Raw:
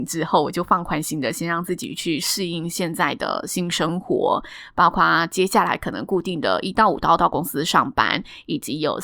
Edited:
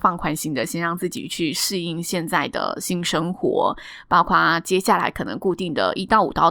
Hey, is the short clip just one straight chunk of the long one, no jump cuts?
yes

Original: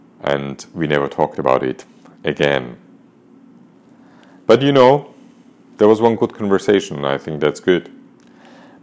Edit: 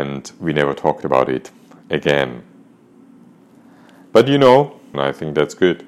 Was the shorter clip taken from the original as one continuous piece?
no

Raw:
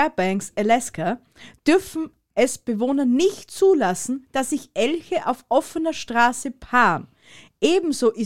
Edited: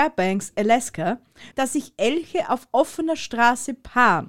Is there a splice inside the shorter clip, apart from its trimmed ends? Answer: yes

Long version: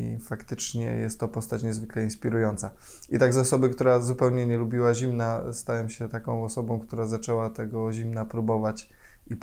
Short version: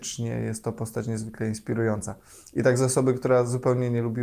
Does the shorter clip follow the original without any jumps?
yes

